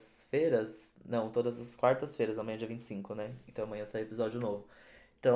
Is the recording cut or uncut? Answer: uncut